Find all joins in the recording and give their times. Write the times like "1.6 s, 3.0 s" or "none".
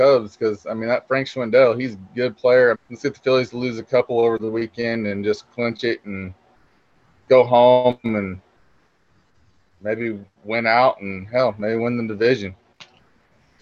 2.7 s